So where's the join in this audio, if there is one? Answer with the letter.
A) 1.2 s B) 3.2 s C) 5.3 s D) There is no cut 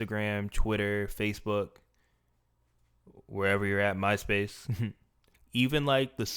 C